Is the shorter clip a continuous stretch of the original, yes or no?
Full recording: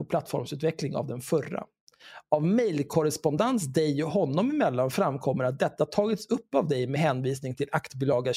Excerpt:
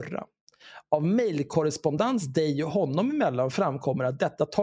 yes